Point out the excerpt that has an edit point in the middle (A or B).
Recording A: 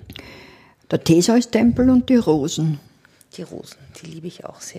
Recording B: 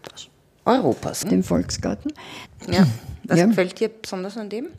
B